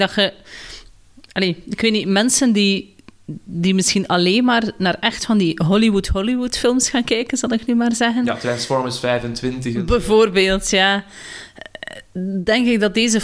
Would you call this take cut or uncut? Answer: uncut